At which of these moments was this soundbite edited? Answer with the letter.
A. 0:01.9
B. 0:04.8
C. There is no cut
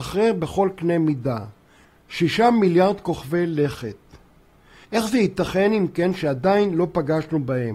B